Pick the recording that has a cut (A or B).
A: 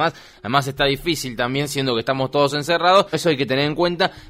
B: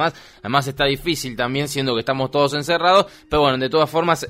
A